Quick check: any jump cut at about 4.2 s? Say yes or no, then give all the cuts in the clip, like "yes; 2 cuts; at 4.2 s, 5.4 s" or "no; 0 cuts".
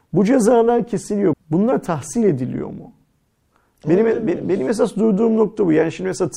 no; 1 cut; at 1.3 s